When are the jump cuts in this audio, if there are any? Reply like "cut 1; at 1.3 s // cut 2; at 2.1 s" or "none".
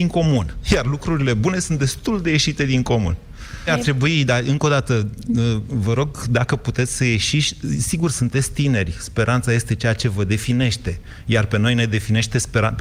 cut 1; at 3.7 s